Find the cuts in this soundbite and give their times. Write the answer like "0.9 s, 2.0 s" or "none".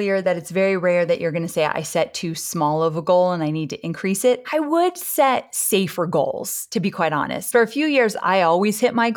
4.4 s, 7.5 s